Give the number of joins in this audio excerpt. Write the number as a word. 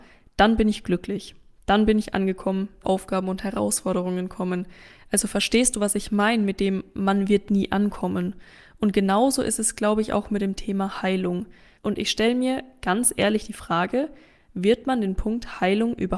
two